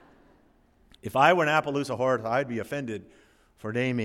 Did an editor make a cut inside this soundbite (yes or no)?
no